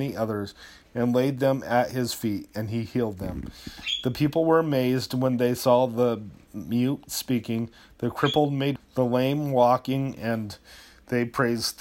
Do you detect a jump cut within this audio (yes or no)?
yes